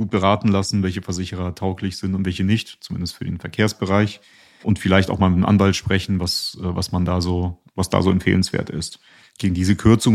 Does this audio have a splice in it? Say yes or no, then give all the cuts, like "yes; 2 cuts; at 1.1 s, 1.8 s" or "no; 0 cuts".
yes; 1 cut; at 9.2 s